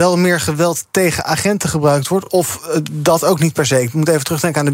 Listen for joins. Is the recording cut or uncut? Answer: uncut